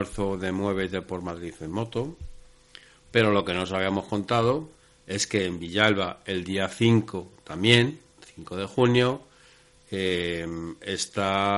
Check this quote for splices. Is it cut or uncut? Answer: uncut